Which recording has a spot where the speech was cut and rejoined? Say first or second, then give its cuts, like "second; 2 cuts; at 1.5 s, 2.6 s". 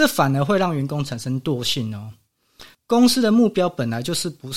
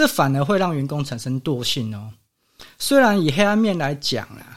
first; 1 cut; at 2.7 s